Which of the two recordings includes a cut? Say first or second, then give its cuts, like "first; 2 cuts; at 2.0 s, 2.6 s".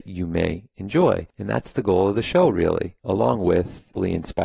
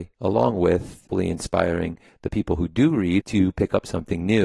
second; 1 cut; at 3.2 s